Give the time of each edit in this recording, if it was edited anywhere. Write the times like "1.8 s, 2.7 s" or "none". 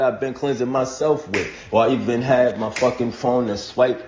1.7 s